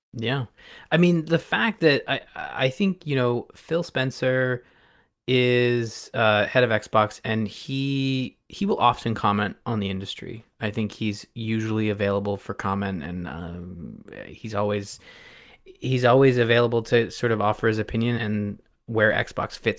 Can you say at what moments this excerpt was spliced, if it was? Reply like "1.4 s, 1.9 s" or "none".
18.2 s